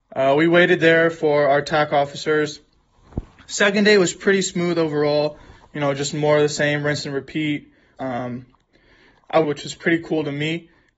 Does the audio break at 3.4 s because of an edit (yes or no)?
no